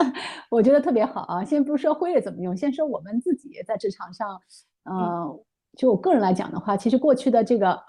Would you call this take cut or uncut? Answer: uncut